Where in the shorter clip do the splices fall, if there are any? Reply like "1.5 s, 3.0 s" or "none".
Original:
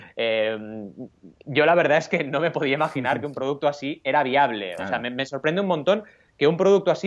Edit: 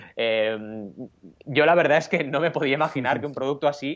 none

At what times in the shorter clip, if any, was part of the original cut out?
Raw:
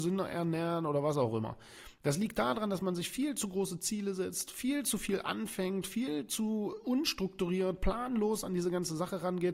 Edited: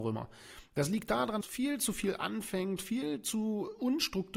1.4 s

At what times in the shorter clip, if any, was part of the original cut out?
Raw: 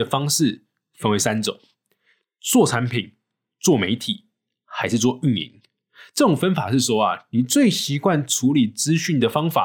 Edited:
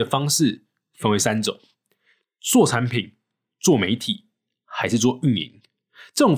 none

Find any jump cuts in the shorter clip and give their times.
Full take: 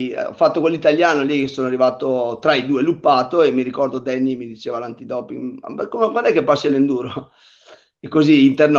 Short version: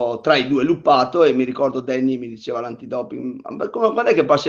none

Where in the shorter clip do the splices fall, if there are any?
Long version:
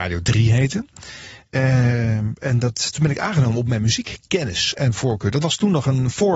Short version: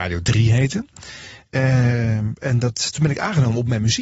none

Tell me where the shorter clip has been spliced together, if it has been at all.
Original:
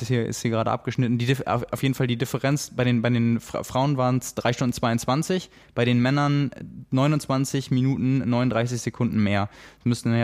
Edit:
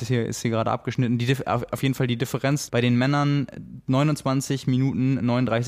2.7 s

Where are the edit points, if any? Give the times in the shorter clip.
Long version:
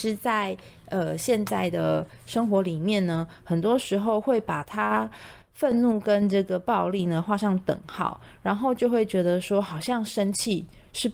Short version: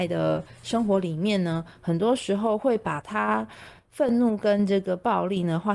none

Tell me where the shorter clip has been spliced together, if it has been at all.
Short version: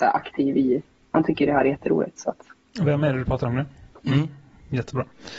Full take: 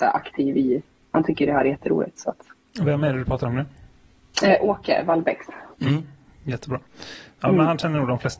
4.0 s

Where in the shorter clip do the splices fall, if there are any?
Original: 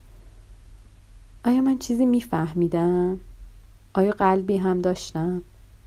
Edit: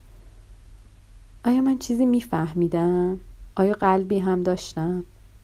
3.5 s

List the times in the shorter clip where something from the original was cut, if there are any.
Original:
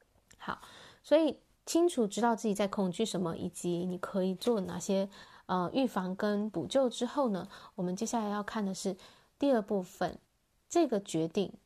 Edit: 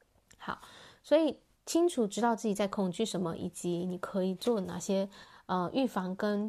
none

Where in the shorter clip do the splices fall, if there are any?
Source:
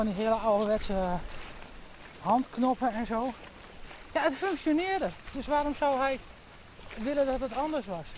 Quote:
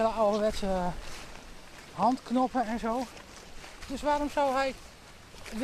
3.8 s

